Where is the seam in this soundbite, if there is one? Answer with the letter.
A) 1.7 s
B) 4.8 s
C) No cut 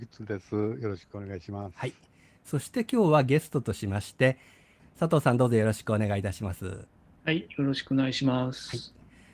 B